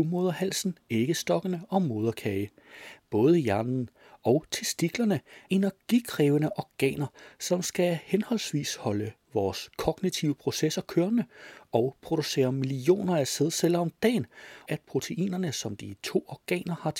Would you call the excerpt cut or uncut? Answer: cut